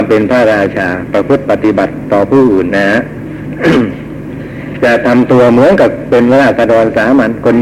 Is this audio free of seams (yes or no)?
no